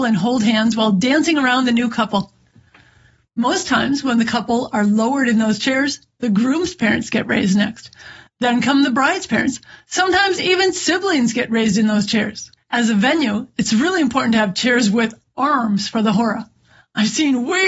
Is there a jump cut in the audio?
no; 0 cuts

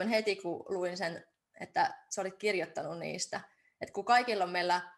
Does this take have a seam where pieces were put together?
no; 0 cuts

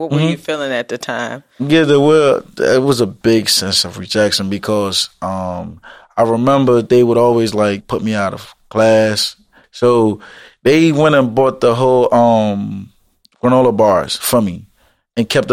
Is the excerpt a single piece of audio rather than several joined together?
no; 2 cuts; at 7.8 s, 9.6 s

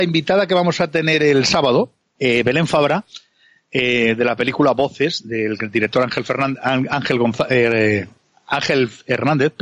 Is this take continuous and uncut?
yes; 0 cuts

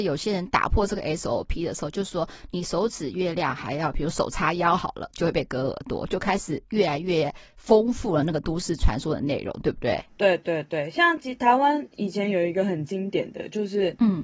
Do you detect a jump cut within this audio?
no; 0 cuts

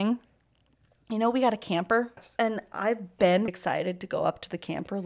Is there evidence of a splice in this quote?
yes; 2 cuts; at 2.2 s, 3.5 s

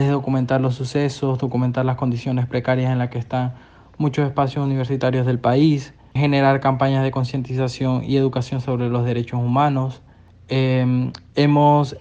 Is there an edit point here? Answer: yes; 1 cut; at 6.2 s

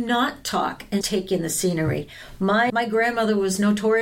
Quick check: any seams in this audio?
yes; 2 cuts; at 1.0 s, 2.7 s

